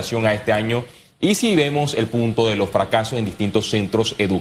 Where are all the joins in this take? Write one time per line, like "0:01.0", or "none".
none